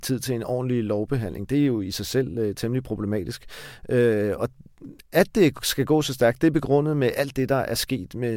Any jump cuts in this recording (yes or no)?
no